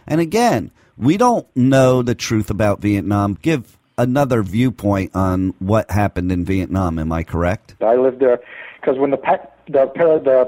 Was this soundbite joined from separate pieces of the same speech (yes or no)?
yes